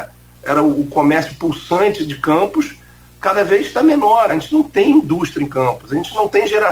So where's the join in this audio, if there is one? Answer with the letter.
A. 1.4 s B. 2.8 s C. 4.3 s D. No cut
C